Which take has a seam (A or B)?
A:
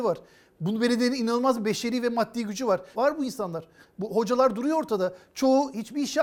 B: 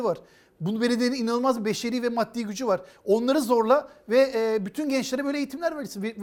A